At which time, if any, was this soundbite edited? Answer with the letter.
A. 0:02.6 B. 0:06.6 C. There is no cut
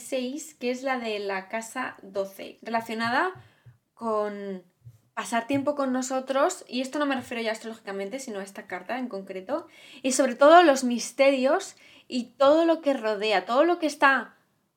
A